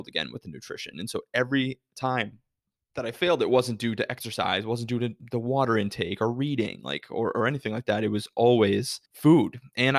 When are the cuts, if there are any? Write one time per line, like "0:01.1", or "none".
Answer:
0:09.1

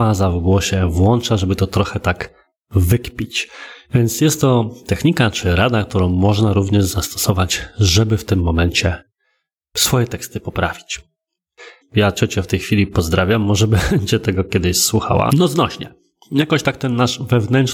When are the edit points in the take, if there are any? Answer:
0:11.8
0:15.3

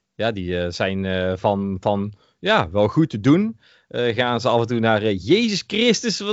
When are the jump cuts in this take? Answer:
none

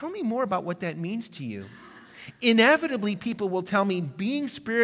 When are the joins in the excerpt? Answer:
none

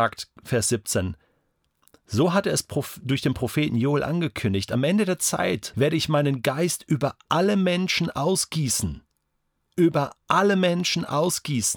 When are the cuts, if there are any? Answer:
0:05.7

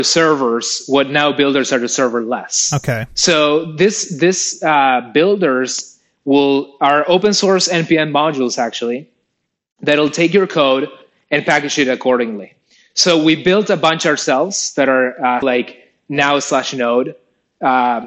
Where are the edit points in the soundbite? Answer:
0:15.4

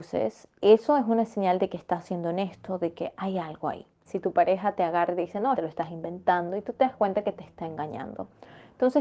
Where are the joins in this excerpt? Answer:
0:04.1
0:05.5

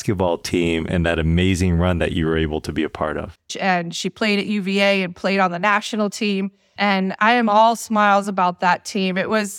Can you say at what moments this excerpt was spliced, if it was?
0:03.5
0:06.8

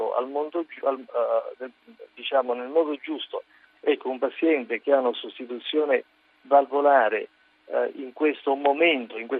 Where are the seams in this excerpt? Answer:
0:03.7

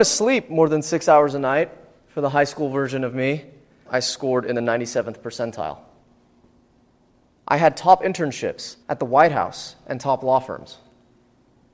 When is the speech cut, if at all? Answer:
0:03.9
0:07.3
0:08.8

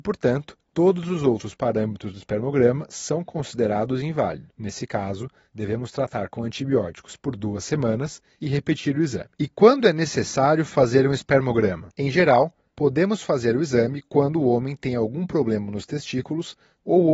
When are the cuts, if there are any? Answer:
none

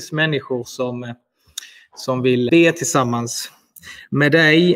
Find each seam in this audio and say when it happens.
0:02.5

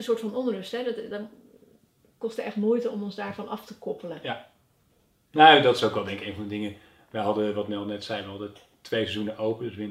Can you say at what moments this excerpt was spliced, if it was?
none

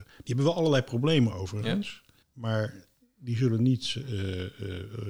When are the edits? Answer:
0:02.2

